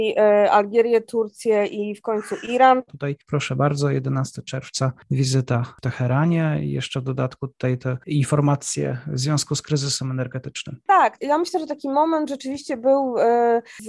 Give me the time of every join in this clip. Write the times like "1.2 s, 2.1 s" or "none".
2.9 s, 11.2 s